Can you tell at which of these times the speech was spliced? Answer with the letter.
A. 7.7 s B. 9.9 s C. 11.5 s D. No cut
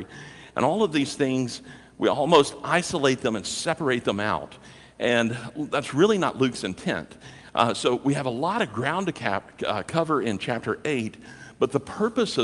D